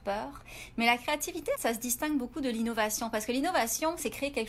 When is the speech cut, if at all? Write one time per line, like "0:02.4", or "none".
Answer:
0:01.5